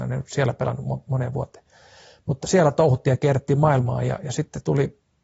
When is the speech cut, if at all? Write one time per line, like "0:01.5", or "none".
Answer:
0:02.4